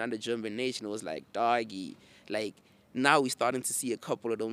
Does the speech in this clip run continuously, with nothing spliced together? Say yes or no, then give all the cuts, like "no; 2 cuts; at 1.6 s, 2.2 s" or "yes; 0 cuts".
yes; 0 cuts